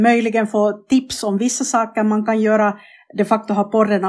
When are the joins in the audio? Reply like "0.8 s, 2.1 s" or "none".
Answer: none